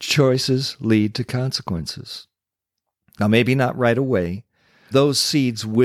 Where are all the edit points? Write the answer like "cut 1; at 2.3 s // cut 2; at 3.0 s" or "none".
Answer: cut 1; at 4.9 s